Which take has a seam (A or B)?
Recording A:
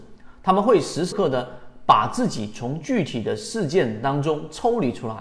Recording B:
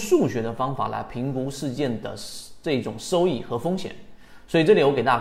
A